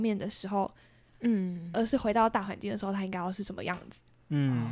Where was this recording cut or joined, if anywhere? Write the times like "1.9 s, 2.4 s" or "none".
1.1 s